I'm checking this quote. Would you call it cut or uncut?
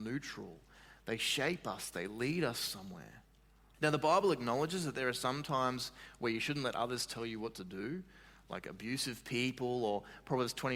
cut